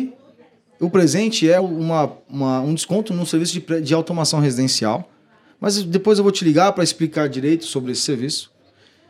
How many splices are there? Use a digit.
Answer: 1